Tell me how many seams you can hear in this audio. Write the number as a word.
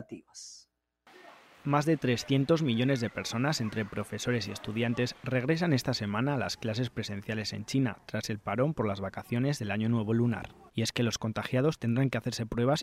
one